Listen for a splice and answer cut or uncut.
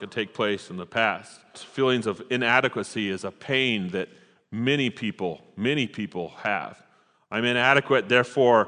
cut